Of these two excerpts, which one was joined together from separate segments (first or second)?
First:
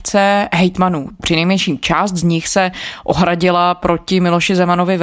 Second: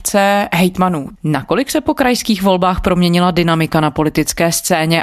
second